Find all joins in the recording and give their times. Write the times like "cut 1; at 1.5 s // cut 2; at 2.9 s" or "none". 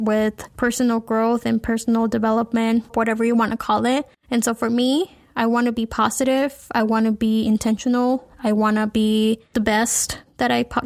cut 1; at 2.9 s // cut 2; at 4.1 s // cut 3; at 9.5 s